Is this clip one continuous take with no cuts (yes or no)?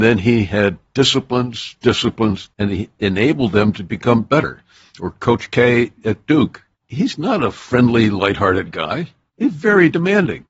no